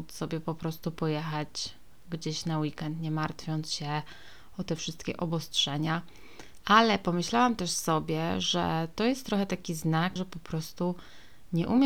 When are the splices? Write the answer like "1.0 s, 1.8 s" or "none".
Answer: 6.6 s, 10.2 s